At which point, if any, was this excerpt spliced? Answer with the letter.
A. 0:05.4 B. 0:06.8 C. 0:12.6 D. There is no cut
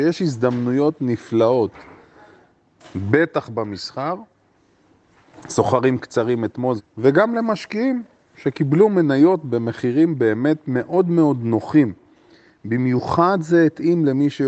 B